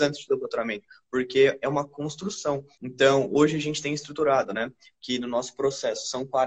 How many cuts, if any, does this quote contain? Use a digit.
1